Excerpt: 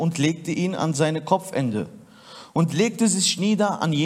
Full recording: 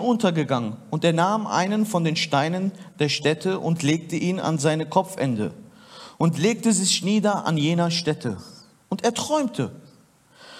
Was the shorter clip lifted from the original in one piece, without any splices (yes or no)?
yes